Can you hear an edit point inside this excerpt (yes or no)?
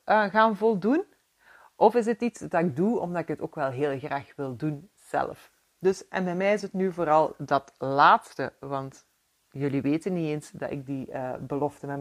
no